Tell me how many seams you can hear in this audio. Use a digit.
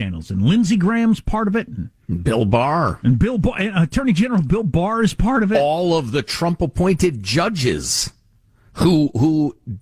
1